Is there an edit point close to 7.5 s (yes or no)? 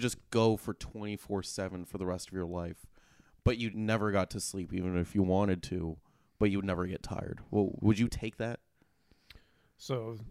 no